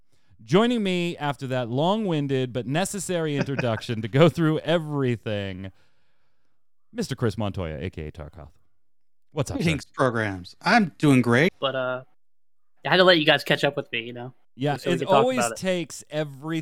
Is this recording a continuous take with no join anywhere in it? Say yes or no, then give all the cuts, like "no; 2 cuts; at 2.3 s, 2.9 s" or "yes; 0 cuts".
no; 2 cuts; at 11.5 s, 14.8 s